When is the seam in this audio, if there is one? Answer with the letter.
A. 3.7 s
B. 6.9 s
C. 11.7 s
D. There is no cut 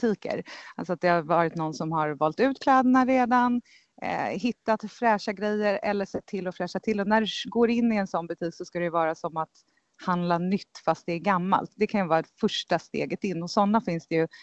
D